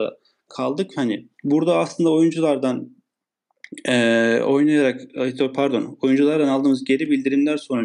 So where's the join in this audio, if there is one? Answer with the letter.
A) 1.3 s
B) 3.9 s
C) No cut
A